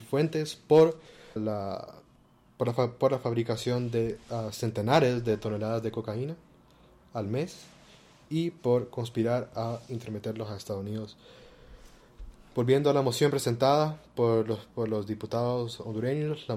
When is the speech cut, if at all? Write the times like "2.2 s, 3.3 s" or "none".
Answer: 1.4 s